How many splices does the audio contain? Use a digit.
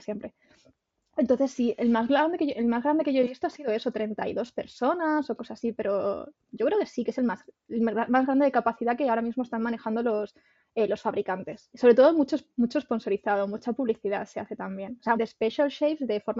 2